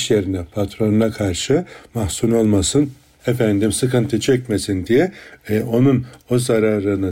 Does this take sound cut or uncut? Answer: cut